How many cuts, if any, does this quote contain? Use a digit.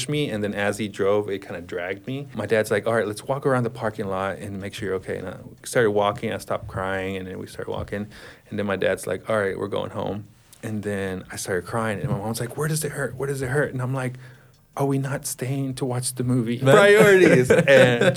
1